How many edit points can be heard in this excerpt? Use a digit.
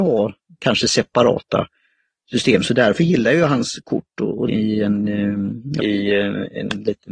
2